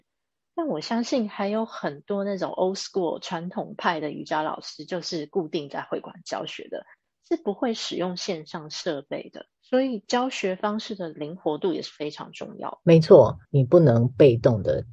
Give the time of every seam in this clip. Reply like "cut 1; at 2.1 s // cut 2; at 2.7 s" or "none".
cut 1; at 9.5 s // cut 2; at 13.4 s